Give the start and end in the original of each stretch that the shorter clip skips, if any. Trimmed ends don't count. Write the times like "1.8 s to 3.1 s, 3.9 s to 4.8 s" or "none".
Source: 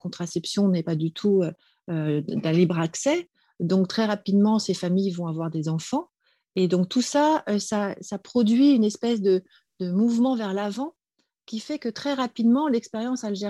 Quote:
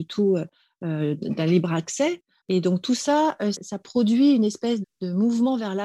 3.5 s to 6.5 s, 7.6 s to 7.9 s, 9.2 s to 9.6 s